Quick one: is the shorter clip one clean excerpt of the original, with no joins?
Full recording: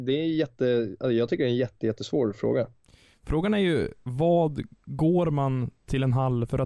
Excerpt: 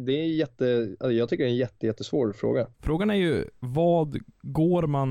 no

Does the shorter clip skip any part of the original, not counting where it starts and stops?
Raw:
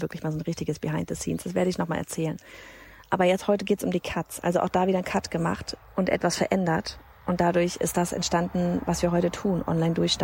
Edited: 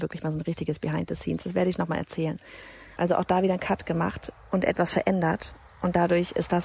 yes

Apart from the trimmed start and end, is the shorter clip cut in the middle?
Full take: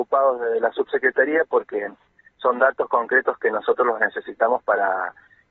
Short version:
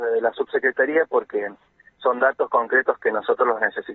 no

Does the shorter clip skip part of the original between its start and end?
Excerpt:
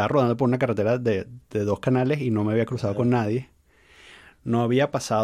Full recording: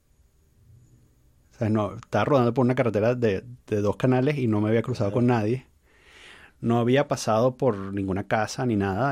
no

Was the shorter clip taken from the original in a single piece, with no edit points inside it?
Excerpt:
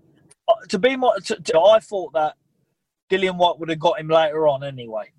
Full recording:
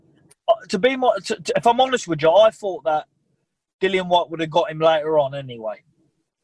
no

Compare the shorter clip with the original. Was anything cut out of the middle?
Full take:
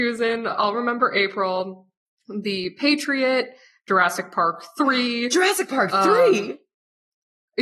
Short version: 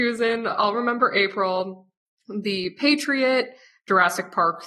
no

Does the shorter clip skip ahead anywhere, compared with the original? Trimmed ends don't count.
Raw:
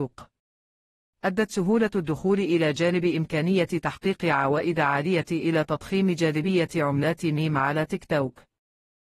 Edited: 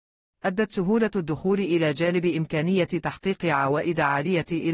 no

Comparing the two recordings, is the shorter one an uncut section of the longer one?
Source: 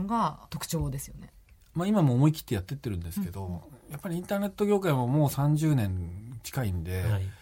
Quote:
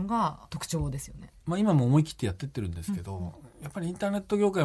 no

